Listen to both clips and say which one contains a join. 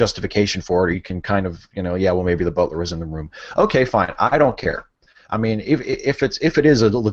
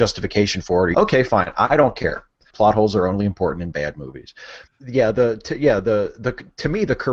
second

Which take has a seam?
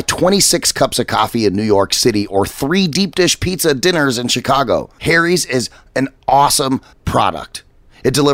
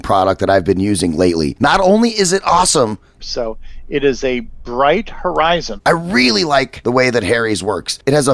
second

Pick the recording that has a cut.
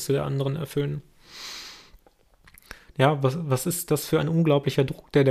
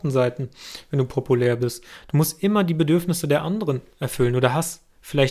first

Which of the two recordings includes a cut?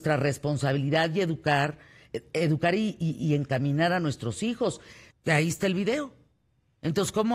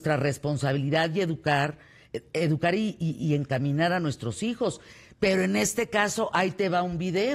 first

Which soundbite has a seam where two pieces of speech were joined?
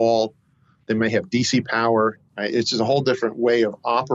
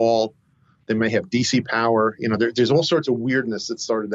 first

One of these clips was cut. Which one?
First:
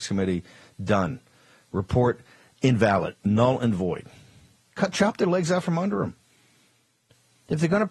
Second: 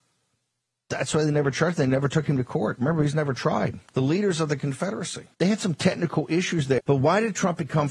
second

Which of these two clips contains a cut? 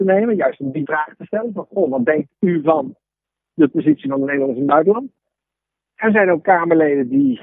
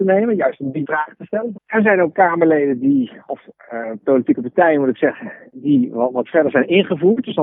second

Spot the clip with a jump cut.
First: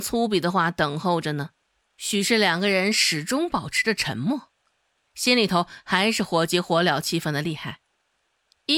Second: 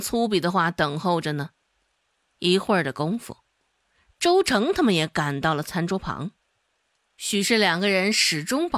first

